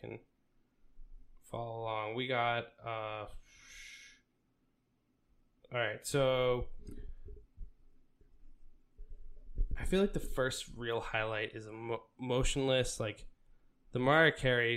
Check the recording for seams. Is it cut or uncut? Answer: uncut